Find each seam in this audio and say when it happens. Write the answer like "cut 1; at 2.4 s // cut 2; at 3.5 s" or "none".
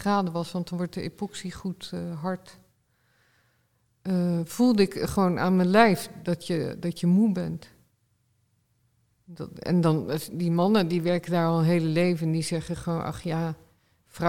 none